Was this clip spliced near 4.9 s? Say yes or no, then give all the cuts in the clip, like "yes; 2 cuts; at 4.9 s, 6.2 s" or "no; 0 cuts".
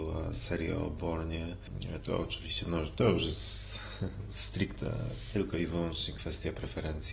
no; 1 cut; at 2.0 s